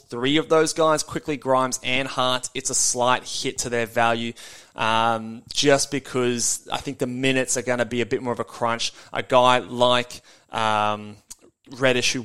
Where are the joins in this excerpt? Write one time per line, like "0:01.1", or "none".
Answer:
none